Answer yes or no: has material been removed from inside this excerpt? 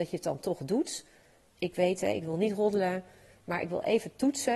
yes